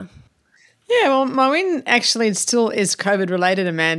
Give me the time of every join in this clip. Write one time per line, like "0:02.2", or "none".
none